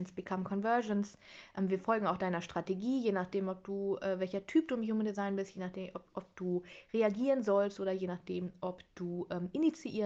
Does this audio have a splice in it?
no; 0 cuts

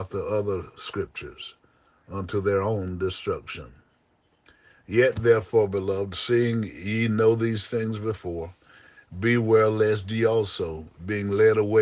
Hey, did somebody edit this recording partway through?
no; 0 cuts

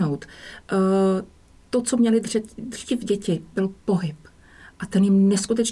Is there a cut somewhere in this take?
no; 0 cuts

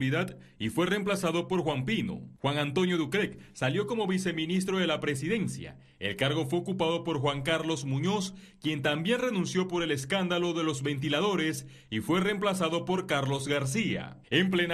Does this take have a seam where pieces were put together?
no; 0 cuts

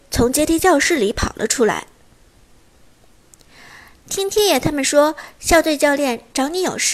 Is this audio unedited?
yes; 0 cuts

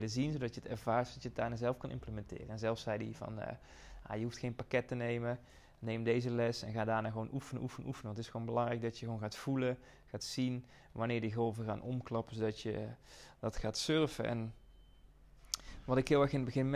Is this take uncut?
yes; 0 cuts

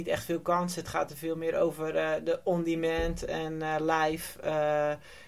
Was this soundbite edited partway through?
no; 0 cuts

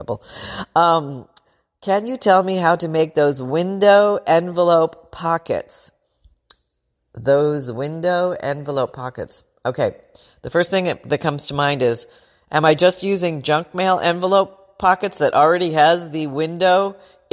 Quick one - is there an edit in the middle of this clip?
no; 0 cuts

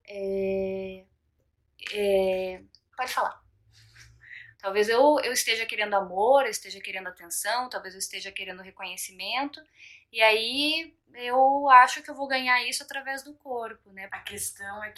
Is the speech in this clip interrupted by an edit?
yes; 2 cuts; at 4.5 s, 14.1 s

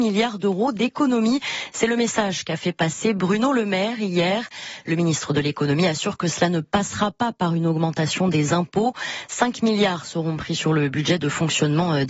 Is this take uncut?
yes; 0 cuts

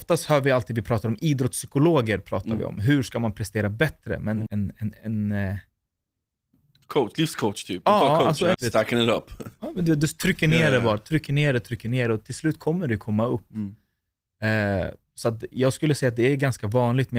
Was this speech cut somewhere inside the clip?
yes; 2 cuts; at 4.5 s, 8.5 s

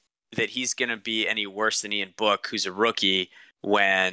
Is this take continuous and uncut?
yes; 0 cuts

